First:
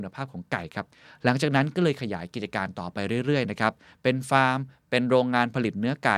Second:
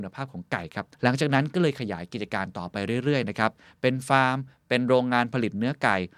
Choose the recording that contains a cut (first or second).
second